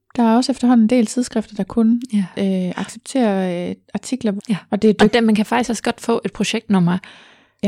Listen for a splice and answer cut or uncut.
cut